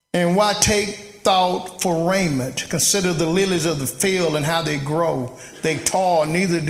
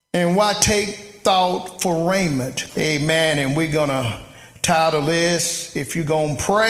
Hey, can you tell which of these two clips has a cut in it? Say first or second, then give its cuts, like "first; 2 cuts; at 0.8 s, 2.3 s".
second; 1 cut; at 2.7 s